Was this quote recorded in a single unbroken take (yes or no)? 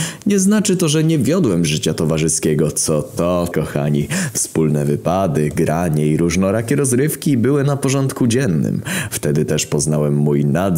no